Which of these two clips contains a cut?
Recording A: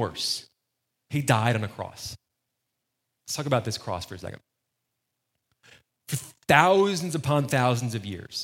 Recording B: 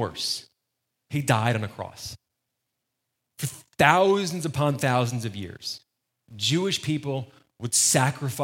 B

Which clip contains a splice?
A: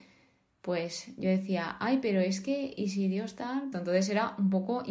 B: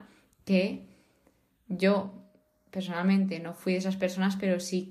A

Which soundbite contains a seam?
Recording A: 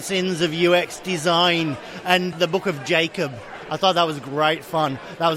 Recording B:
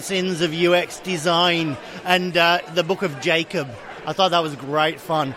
A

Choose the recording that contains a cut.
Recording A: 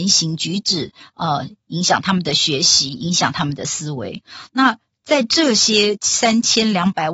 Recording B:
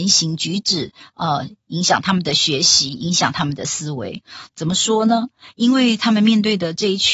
B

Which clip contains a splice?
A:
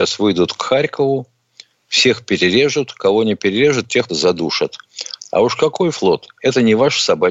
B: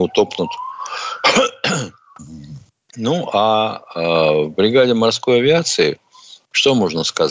A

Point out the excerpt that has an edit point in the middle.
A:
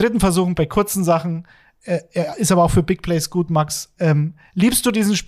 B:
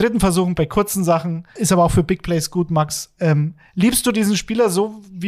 B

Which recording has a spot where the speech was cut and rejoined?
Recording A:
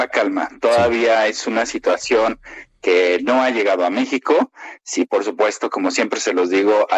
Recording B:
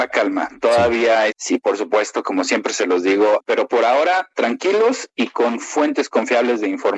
B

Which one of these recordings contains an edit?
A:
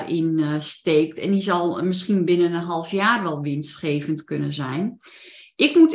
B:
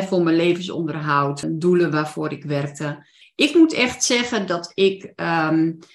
B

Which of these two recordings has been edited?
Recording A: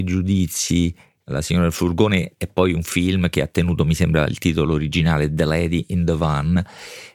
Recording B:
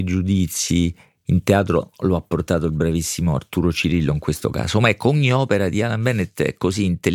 A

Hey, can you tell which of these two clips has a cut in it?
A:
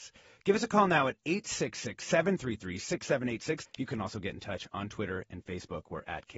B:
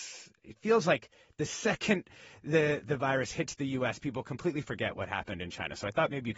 A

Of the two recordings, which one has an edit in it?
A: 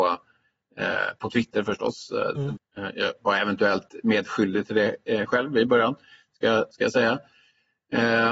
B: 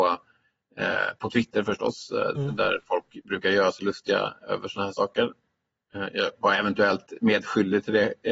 A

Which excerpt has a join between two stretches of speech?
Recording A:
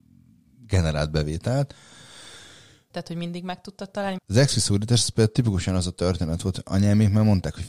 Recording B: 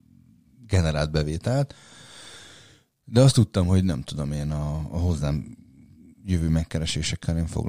A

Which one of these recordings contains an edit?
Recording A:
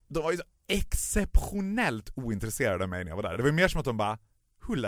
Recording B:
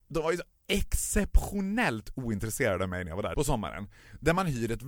B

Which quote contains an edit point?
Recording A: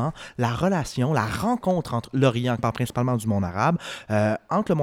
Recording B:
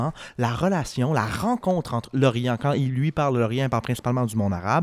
A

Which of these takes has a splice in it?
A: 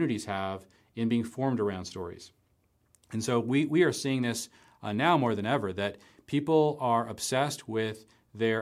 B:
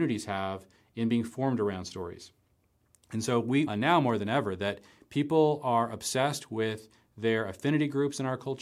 B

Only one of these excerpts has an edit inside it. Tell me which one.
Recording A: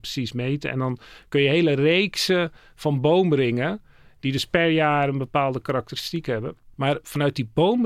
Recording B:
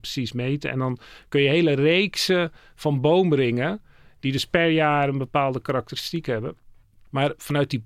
A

